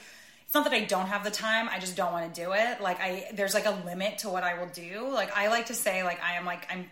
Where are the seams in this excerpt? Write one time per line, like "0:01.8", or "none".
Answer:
0:05.3